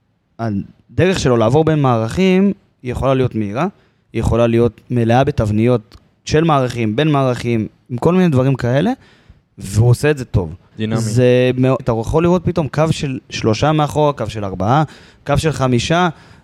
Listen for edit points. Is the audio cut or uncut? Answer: cut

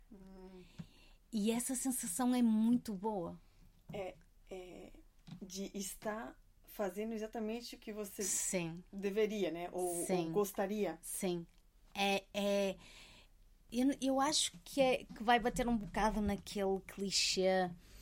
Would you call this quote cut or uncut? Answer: uncut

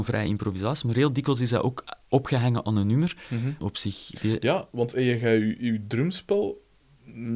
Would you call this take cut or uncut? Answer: cut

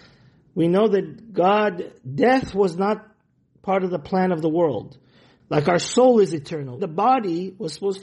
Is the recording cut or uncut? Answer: cut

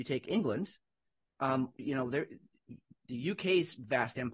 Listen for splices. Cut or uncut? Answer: cut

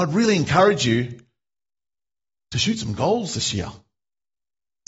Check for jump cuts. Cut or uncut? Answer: uncut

